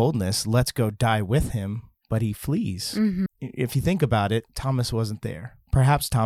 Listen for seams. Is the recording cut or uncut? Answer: cut